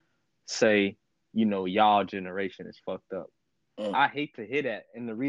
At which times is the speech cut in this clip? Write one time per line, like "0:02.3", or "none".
0:03.9

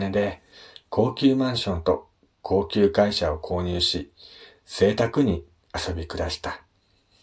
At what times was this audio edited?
none

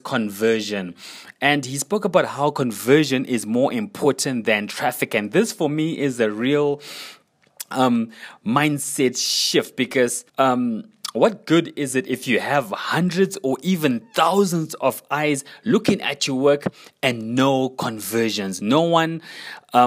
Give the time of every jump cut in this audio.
0:10.3
0:18.6

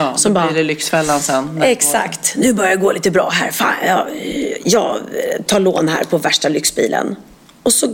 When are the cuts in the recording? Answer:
0:05.5

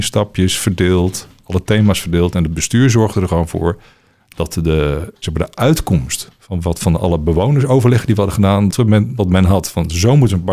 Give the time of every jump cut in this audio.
0:08.7

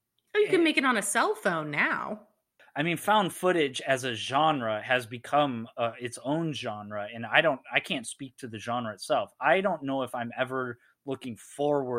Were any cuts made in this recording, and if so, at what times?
0:02.6

